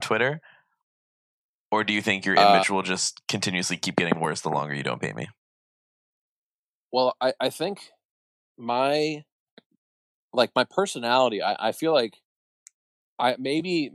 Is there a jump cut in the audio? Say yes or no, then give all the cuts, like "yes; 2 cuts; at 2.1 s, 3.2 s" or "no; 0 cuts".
no; 0 cuts